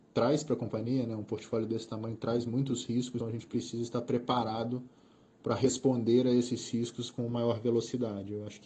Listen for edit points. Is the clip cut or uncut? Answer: cut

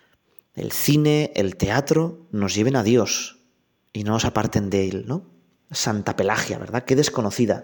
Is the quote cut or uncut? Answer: uncut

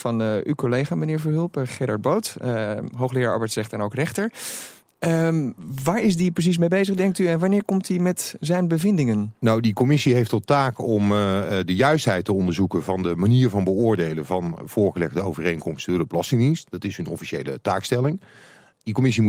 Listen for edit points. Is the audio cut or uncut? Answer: uncut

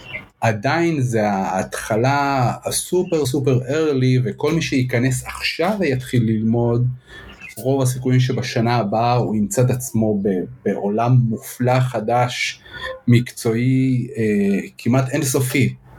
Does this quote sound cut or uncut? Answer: cut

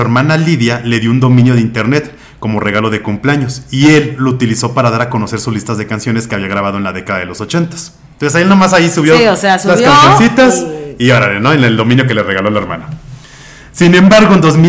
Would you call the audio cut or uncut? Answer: uncut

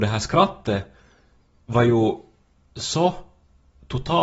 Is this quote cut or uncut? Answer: uncut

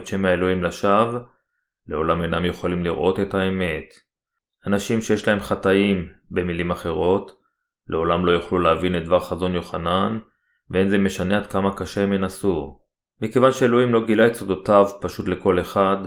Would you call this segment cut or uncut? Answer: cut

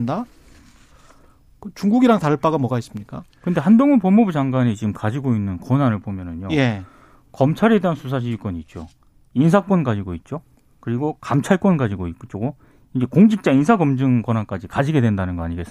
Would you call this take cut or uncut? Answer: uncut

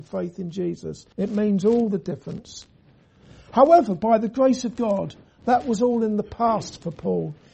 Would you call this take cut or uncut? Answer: cut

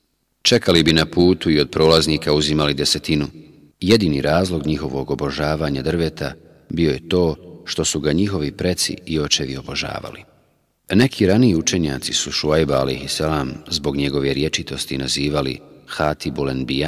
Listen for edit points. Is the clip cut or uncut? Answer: cut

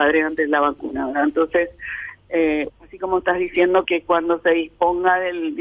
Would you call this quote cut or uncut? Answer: cut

